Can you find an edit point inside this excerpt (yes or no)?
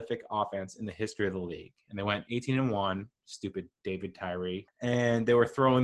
yes